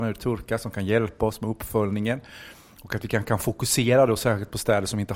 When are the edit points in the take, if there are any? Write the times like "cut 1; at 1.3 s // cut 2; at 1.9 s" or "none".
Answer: none